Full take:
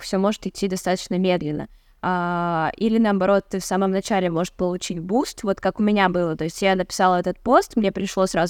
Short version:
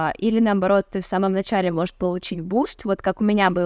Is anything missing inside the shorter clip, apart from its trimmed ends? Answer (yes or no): no